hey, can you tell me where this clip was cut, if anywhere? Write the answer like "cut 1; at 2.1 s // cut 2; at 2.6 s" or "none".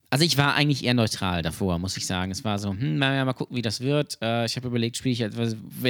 none